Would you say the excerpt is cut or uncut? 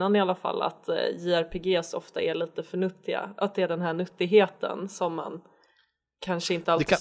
uncut